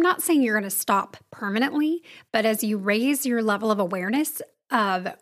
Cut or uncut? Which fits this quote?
uncut